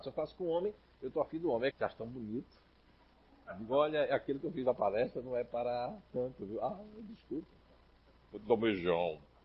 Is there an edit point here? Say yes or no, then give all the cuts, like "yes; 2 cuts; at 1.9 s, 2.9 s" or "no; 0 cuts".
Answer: yes; 2 cuts; at 1.7 s, 8.1 s